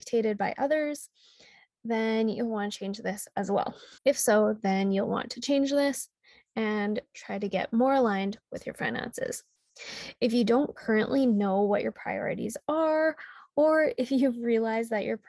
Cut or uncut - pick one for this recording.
cut